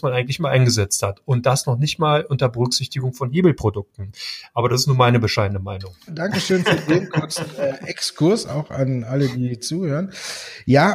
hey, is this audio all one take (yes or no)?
no